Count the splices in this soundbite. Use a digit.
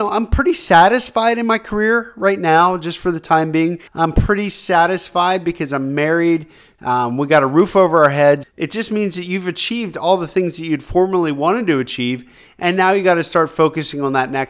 2